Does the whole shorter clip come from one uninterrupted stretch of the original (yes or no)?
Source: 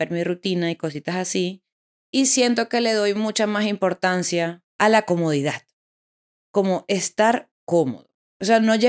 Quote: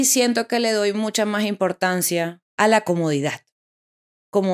yes